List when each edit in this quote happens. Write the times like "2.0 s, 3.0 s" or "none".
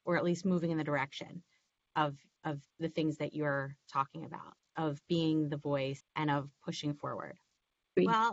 2.7 s, 6.0 s